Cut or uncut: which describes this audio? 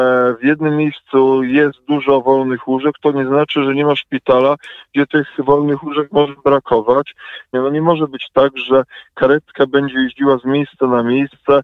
cut